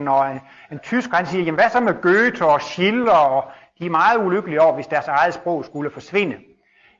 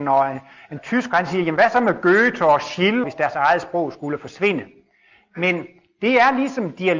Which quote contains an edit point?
second; 1 cut; at 3.0 s

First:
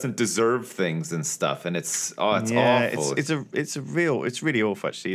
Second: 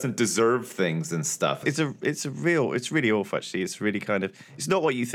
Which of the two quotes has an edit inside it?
second; 1 cut; at 1.6 s

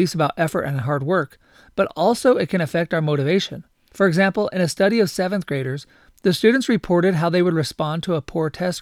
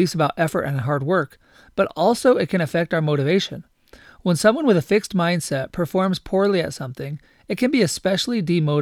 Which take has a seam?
first; 1 cut; at 3.9 s

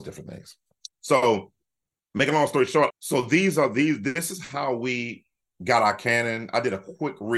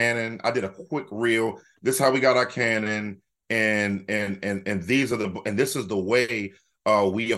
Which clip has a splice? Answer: first; 1 cut; at 2.9 s

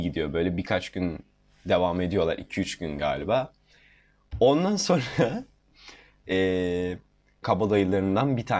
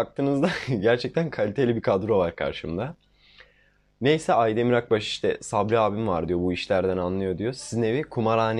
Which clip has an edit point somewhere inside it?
first; 1 cut; at 7.4 s

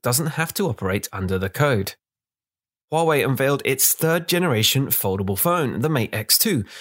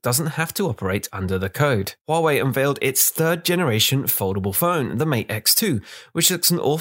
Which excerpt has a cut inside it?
second; 1 cut; at 2.0 s

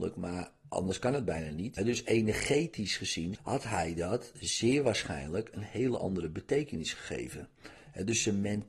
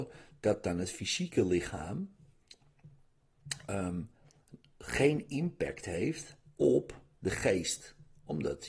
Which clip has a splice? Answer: first; 2 cuts; at 1.8 s, 3.4 s

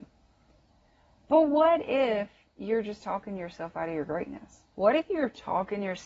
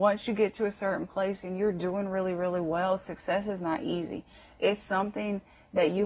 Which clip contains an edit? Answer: first; 1 cut; at 4.7 s

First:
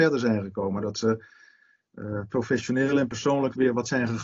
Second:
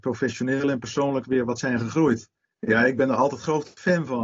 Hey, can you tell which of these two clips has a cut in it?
second; 1 cut; at 2.6 s

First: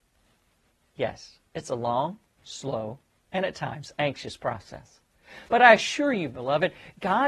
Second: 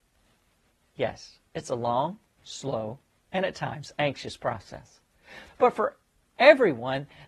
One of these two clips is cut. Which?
second; 1 cut; at 5.5 s

